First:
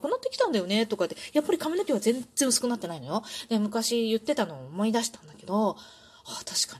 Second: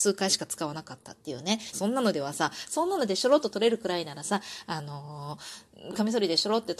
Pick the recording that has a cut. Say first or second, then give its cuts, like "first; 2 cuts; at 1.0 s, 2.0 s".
second; 1 cut; at 1.7 s